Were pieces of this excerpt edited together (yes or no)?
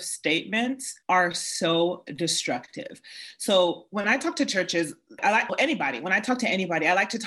yes